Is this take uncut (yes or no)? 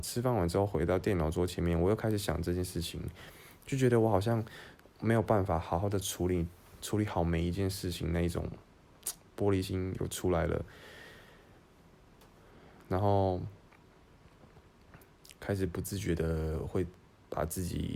yes